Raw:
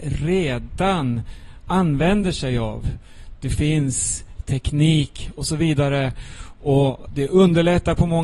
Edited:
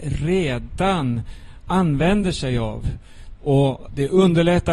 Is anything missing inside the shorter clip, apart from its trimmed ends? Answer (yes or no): yes